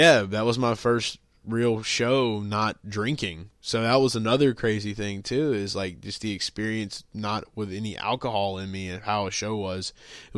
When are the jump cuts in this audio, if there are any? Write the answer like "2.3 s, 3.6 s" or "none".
none